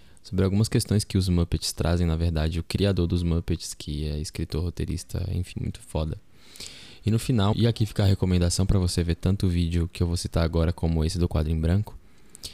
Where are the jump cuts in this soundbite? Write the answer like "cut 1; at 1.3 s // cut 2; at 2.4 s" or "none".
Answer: cut 1; at 5.5 s // cut 2; at 7.5 s